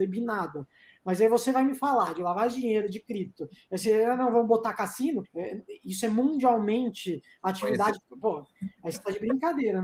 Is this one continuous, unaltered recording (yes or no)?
no